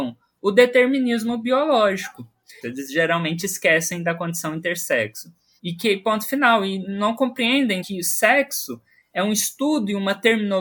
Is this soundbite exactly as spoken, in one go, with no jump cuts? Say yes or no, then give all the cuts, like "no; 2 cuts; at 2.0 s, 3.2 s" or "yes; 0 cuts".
no; 3 cuts; at 2.6 s, 5.6 s, 7.8 s